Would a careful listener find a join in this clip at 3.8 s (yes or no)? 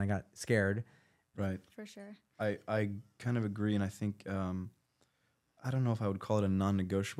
no